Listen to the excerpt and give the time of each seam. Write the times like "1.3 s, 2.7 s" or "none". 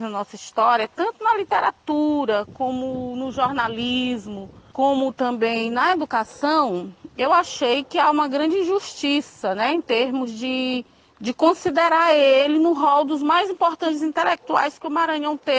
none